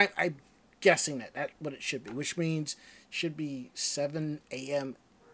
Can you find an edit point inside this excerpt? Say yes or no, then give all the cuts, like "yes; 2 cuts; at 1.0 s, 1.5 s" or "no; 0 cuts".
no; 0 cuts